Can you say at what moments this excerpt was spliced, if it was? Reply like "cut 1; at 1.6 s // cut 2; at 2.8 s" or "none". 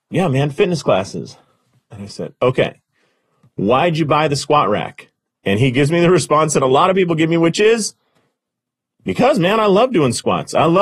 none